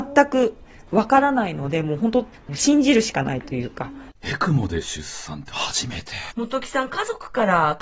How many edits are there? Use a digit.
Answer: 2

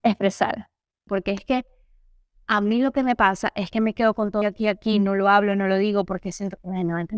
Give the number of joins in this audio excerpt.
2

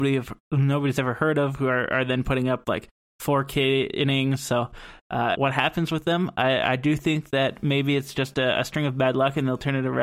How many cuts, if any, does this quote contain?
1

